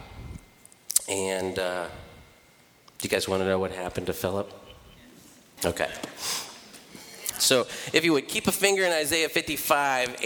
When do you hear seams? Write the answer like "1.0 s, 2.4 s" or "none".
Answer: 5.6 s, 7.3 s